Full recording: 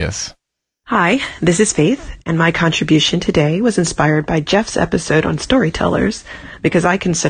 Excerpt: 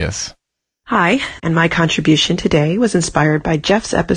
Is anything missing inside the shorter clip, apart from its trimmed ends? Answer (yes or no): yes